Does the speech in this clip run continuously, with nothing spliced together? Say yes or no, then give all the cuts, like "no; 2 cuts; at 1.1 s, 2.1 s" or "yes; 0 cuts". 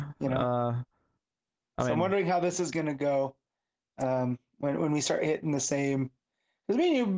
yes; 0 cuts